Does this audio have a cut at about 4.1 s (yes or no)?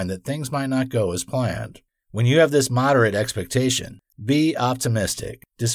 yes